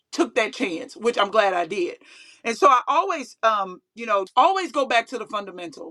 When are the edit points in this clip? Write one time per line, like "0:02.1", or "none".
0:04.3